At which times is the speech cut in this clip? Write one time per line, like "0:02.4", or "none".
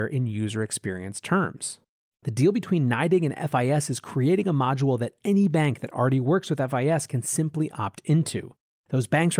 none

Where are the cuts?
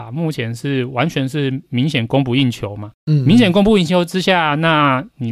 none

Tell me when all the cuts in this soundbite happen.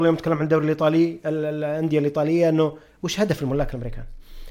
none

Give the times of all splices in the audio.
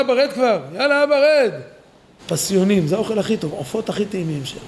0:02.2

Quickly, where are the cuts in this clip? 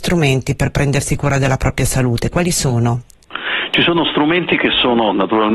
none

